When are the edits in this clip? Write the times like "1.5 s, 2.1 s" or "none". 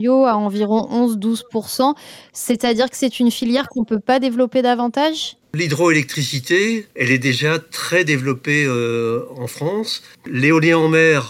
10.1 s